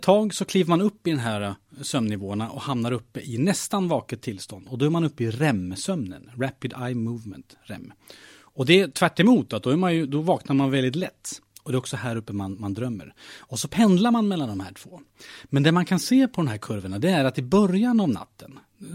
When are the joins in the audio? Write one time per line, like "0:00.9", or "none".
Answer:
none